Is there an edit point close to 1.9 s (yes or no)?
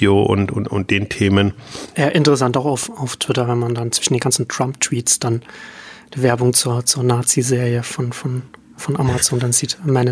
no